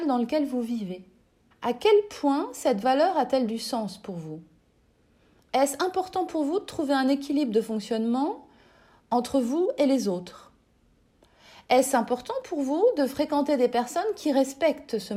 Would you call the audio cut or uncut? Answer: cut